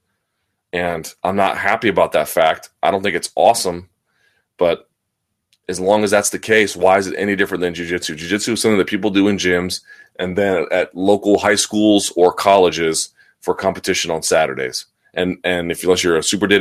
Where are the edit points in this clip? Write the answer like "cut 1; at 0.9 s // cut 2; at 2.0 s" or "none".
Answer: cut 1; at 1.2 s

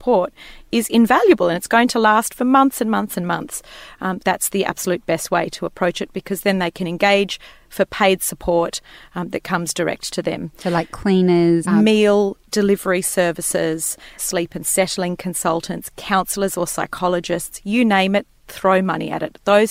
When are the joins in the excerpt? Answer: cut 1; at 4.2 s // cut 2; at 11.6 s // cut 3; at 14.2 s

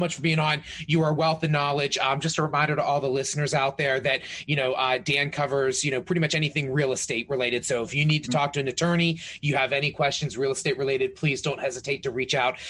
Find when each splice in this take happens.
none

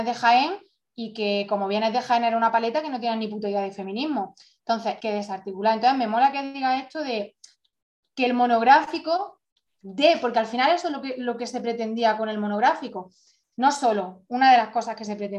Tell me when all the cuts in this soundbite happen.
cut 1; at 5.0 s

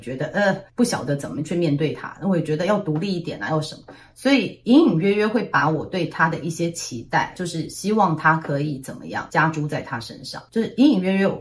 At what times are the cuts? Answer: none

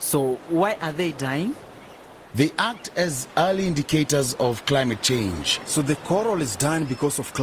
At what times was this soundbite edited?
cut 1; at 2.3 s

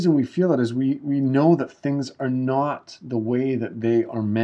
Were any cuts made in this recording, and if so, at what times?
none

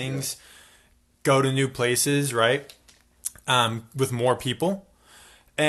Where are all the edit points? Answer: none

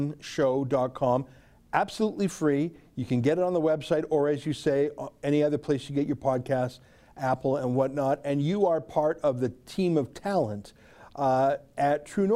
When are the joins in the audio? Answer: none

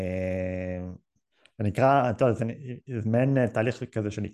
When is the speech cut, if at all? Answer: none

